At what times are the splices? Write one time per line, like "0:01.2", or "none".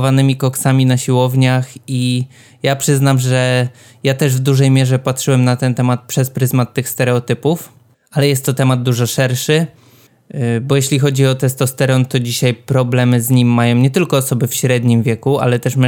none